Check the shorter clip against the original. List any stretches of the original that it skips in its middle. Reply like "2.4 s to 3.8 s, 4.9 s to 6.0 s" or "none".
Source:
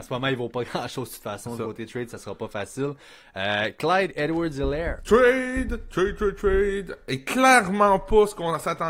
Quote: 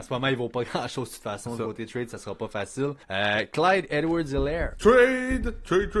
3.0 s to 3.3 s